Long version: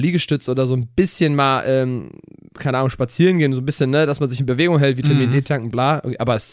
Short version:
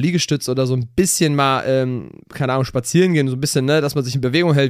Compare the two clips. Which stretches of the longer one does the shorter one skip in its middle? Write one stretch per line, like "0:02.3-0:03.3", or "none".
0:02.2-0:02.5